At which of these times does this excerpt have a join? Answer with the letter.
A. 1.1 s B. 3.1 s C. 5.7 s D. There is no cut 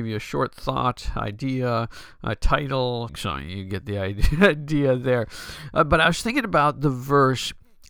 B